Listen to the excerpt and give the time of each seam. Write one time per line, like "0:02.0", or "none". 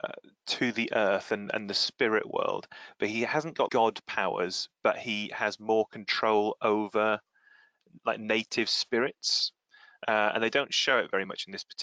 0:03.7